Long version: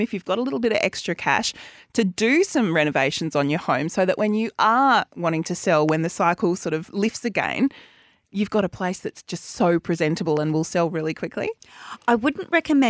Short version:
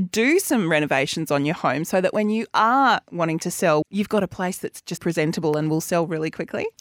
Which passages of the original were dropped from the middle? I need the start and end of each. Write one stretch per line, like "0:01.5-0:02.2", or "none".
0:05.9-0:08.2
0:09.4-0:09.8

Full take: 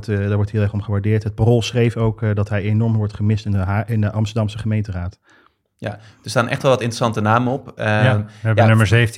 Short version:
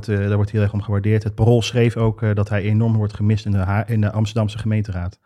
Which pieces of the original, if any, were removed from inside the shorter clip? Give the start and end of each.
none

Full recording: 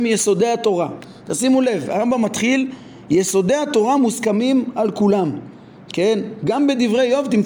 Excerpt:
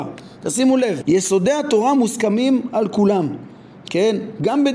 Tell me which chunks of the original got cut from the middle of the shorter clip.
0:01.9-0:03.0

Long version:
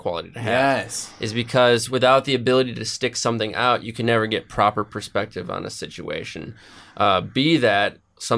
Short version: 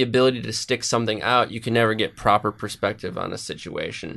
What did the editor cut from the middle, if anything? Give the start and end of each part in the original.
none

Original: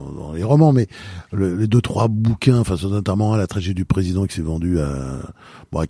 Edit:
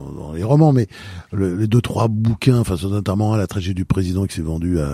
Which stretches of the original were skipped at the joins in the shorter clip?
none

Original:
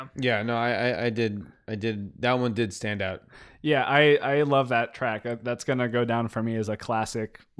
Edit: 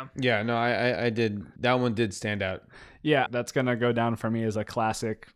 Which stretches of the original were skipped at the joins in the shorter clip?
0:01.6-0:02.2
0:03.9-0:05.4

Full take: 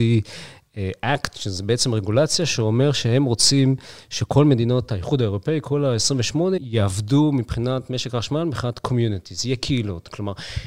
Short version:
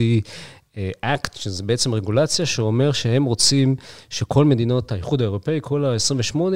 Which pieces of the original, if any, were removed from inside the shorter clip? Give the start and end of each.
none

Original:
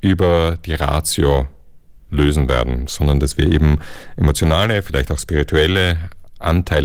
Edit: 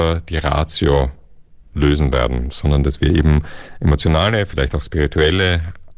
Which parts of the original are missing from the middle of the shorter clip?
none

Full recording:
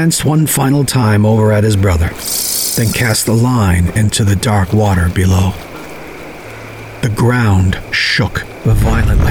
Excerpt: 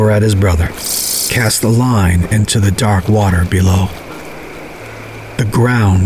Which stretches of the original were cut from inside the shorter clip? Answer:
0:02.7-0:02.9

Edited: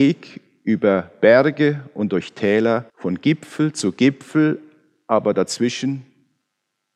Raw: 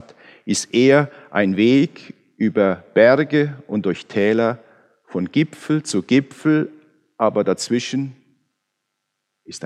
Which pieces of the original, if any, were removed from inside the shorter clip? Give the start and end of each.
0:04.6-0:05.0

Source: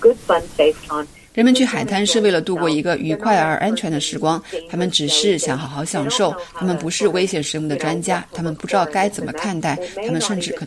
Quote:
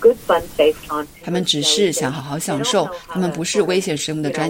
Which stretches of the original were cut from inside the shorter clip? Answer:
0:01.2-0:04.7

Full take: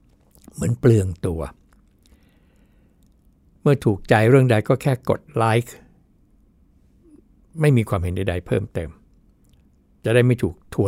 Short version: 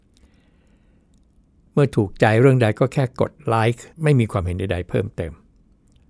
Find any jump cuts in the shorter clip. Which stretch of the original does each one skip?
0:05.8-0:07.5

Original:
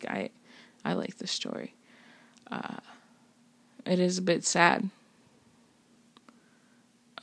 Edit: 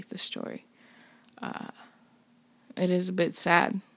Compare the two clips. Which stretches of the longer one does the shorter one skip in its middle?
none

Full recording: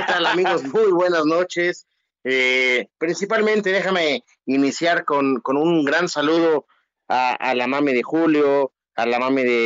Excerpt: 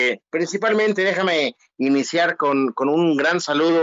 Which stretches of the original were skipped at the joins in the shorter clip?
none

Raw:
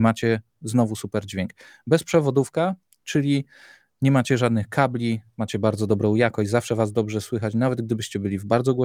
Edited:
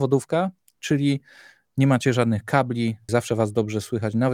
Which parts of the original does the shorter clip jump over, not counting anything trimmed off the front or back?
0:05.3-0:06.5

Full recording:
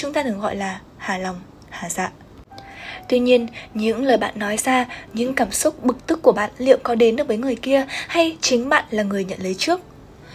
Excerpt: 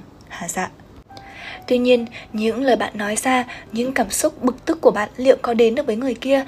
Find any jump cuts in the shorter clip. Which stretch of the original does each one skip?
none

